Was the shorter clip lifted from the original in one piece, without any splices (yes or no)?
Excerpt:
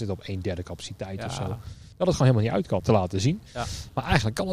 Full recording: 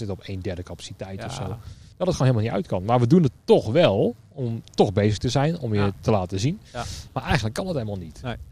no